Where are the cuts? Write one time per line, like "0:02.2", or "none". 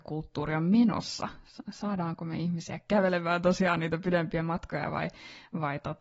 none